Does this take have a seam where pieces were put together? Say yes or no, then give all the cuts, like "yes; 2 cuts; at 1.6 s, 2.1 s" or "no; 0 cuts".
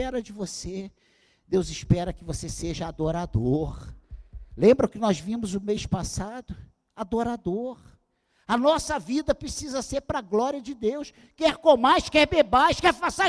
no; 0 cuts